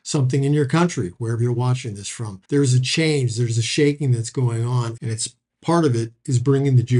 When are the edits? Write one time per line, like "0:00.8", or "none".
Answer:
0:02.4
0:05.0